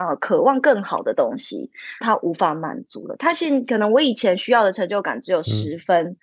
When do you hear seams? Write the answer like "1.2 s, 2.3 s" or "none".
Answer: 2.0 s